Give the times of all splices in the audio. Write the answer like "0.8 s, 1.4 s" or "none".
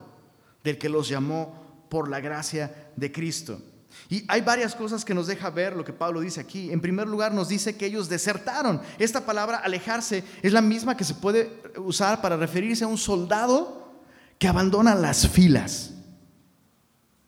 none